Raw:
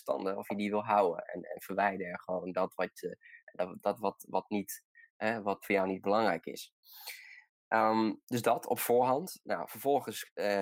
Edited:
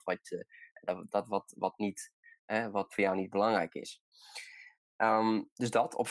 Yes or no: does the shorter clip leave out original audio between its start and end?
no